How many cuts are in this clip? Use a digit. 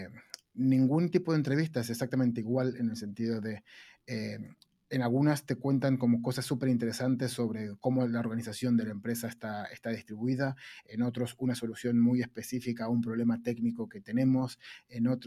0